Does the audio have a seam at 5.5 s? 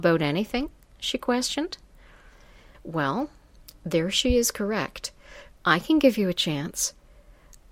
yes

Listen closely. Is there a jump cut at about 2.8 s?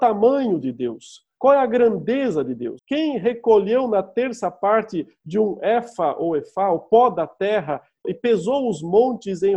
yes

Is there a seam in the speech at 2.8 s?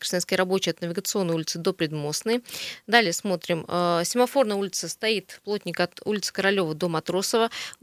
no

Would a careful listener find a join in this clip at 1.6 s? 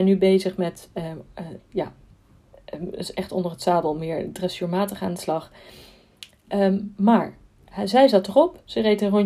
yes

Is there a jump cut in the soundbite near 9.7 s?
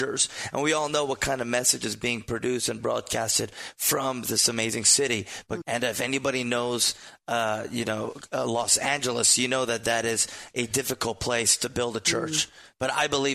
no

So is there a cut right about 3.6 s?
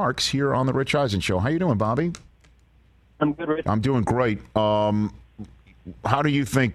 yes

